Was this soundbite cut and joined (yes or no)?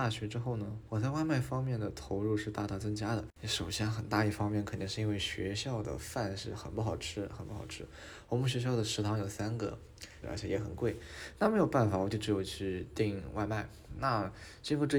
yes